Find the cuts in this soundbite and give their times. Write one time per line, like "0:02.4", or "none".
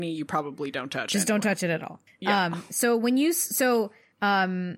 none